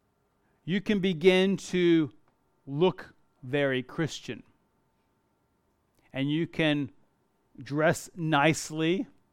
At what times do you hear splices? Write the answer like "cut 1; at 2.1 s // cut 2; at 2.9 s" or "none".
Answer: none